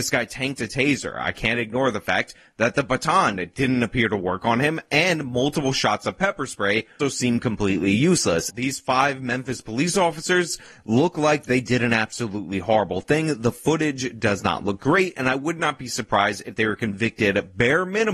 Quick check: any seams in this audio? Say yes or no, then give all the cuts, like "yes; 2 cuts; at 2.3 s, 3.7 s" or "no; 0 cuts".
yes; 2 cuts; at 7.0 s, 8.5 s